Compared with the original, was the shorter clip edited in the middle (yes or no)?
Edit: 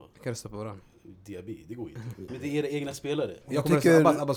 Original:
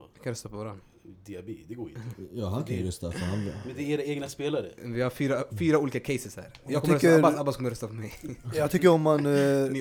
yes